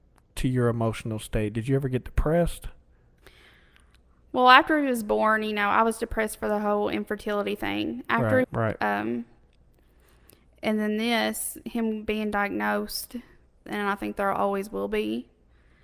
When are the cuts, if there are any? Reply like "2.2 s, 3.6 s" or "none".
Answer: 8.4 s, 13.7 s

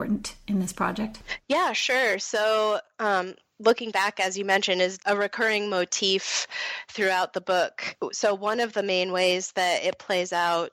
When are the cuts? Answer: 5.0 s

